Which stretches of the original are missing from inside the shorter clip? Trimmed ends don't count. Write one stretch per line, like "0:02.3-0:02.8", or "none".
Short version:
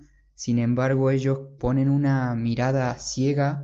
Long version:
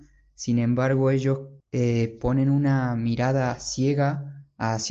0:01.6-0:02.2